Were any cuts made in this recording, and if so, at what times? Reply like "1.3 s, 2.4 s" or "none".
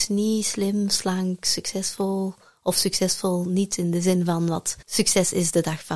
4.8 s